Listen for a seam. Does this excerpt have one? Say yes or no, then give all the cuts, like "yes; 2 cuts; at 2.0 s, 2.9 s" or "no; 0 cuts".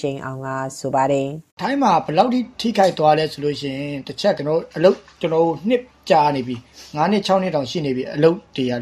yes; 2 cuts; at 1.5 s, 4.4 s